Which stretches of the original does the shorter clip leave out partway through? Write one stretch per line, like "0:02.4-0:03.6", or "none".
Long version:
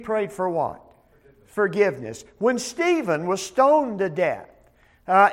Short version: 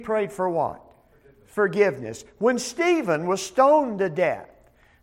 none

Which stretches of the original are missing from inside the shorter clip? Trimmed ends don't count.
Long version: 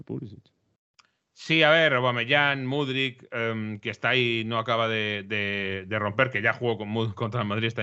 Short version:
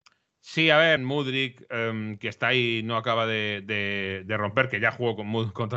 0:01.9-0:02.6

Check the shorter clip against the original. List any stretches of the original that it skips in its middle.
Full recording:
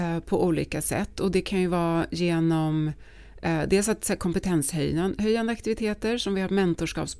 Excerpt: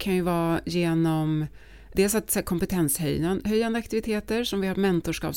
0:03.4-0:03.7

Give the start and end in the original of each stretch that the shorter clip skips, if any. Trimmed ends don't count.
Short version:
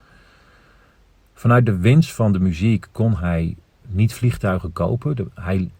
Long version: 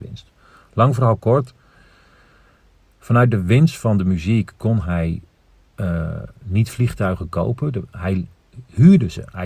0:05.5-0:06.4

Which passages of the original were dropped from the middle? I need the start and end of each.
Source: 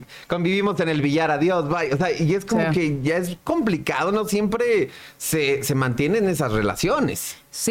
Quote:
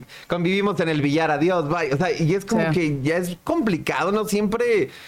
none

